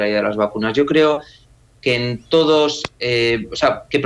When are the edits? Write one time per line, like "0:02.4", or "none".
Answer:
none